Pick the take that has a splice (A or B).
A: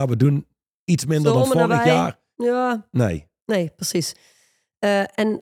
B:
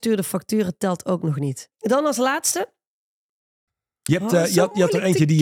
B